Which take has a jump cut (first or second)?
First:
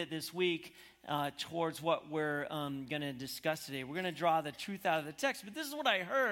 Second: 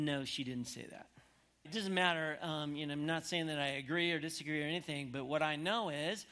second